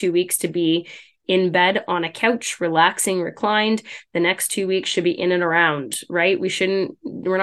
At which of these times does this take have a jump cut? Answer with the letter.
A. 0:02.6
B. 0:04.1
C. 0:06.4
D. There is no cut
D